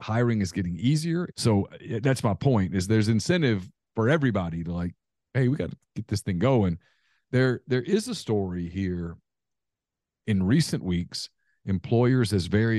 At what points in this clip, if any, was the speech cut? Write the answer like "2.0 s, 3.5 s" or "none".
1.3 s, 10.2 s